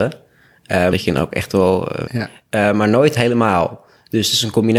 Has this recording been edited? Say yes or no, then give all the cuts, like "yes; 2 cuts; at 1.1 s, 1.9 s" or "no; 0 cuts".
yes; 2 cuts; at 0.9 s, 2.1 s